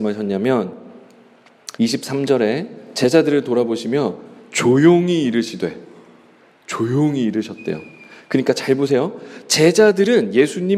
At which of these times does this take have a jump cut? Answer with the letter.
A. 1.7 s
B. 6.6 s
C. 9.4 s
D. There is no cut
A